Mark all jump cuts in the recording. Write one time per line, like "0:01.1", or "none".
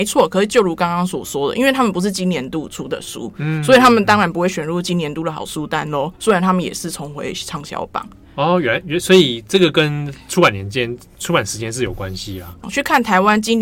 0:12.6